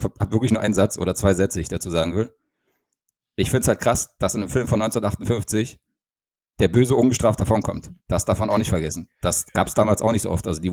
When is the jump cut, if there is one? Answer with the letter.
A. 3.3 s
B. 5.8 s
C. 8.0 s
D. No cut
C